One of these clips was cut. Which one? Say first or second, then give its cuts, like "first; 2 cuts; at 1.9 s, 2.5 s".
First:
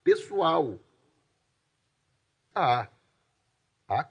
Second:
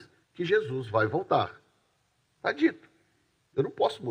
first; 1 cut; at 2.5 s